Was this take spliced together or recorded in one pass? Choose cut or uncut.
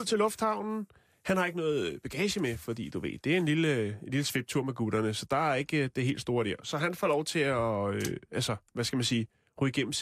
uncut